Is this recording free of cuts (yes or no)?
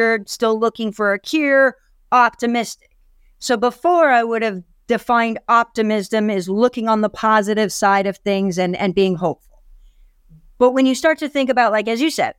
yes